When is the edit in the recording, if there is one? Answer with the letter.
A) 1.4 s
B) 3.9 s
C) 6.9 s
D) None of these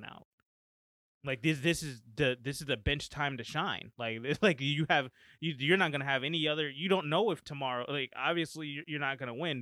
D